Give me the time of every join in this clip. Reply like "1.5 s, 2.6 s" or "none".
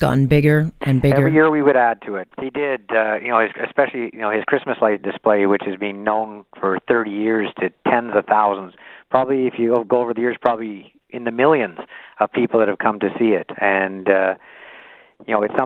2.3 s